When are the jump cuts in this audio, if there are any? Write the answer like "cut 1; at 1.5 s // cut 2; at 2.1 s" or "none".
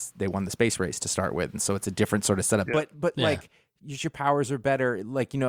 cut 1; at 2.7 s // cut 2; at 4.0 s